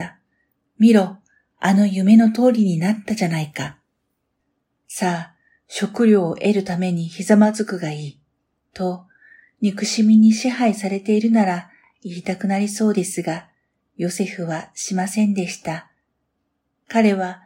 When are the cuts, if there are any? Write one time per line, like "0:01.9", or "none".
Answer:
none